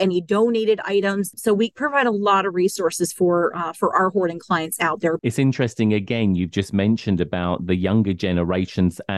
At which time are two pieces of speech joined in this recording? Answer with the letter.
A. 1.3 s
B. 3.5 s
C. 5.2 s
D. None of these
C